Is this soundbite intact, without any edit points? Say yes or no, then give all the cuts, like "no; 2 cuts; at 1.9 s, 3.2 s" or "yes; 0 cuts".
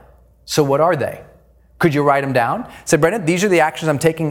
yes; 0 cuts